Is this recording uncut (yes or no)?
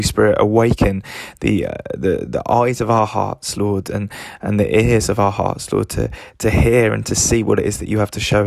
yes